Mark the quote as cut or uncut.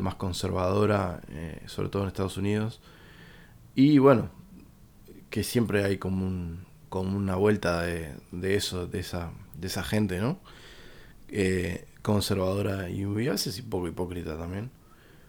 uncut